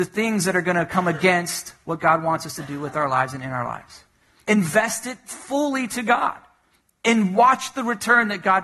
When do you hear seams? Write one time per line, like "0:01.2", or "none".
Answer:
0:04.4